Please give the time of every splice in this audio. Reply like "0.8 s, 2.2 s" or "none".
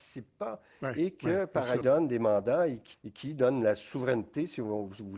1.8 s, 2.9 s